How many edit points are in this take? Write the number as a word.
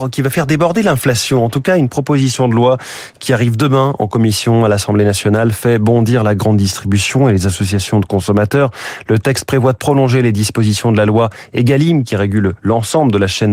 zero